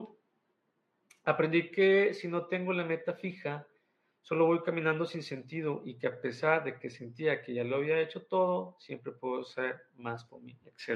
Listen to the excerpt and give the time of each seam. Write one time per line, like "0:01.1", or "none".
none